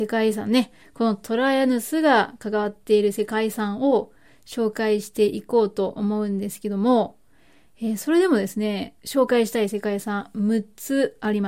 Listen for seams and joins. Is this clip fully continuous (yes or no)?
no